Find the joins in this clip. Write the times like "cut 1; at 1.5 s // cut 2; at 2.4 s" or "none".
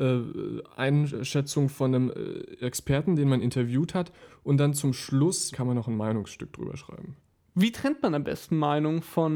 cut 1; at 5.5 s